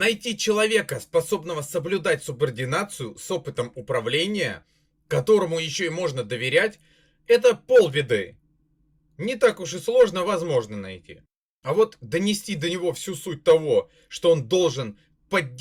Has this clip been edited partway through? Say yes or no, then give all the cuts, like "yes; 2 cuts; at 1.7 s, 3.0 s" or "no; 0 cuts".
no; 0 cuts